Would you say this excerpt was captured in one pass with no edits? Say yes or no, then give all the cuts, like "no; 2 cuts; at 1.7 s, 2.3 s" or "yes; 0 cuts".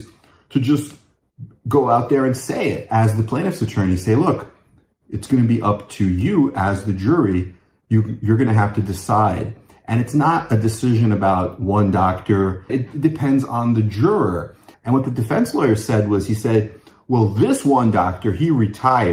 no; 2 cuts; at 12.7 s, 14.7 s